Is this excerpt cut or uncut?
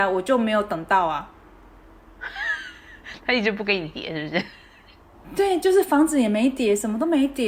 uncut